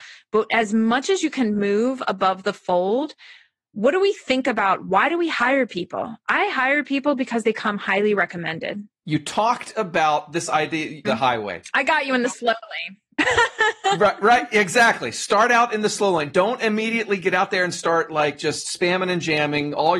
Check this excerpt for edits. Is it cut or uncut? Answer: cut